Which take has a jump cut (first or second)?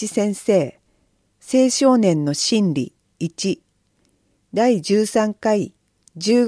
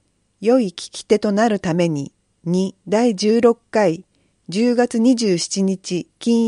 second